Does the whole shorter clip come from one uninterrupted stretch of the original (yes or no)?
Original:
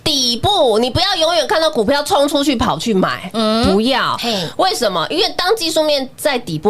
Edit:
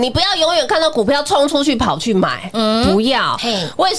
yes